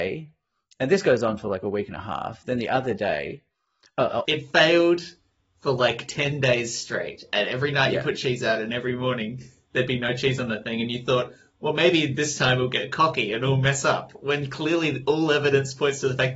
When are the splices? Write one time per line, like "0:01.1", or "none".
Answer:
0:04.2